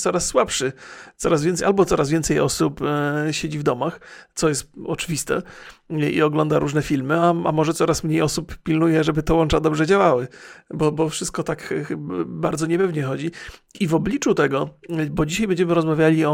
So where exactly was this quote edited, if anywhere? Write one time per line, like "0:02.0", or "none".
none